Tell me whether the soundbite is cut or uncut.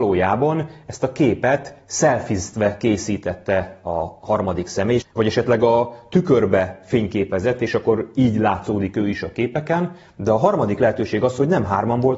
cut